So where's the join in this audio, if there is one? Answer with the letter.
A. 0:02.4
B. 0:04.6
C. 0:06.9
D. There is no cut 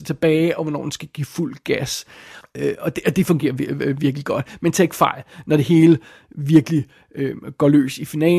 A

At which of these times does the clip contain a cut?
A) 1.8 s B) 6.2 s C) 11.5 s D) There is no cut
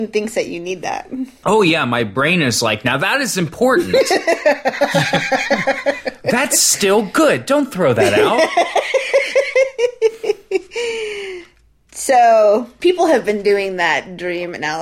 D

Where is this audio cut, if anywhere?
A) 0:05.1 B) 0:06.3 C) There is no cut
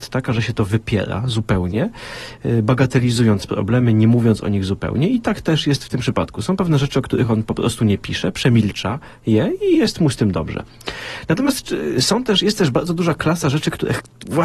C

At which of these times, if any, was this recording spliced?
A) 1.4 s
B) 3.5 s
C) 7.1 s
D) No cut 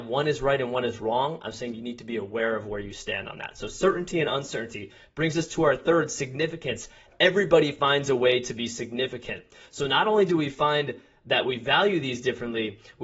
D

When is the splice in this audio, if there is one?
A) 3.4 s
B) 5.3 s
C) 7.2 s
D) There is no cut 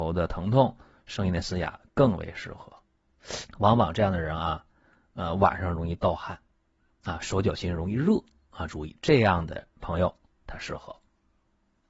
A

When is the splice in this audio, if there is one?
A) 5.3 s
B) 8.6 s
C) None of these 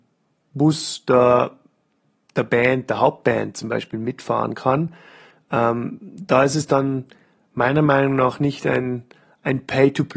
C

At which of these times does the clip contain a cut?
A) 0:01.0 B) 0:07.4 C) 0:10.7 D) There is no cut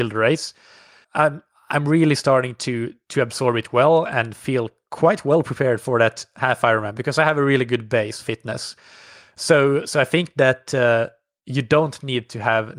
A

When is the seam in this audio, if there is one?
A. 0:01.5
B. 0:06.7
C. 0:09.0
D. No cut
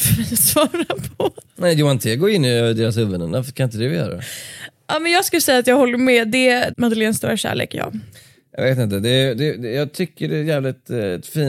B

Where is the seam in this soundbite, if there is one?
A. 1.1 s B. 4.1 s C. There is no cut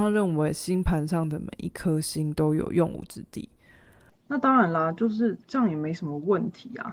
B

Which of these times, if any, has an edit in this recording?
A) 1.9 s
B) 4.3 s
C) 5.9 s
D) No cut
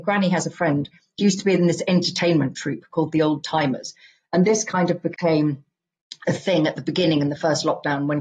B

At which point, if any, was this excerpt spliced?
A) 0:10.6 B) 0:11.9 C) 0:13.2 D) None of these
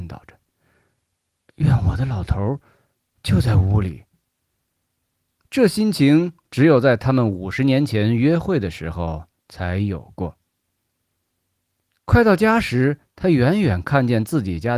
B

